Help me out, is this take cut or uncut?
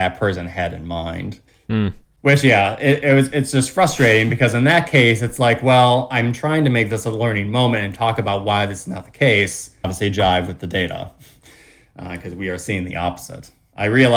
cut